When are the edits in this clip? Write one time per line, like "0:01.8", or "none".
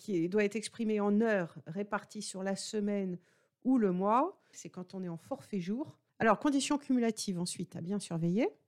0:04.5
0:06.1